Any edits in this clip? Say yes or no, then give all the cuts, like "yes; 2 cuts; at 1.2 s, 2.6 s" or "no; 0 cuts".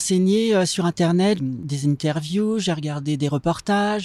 yes; 1 cut; at 1.4 s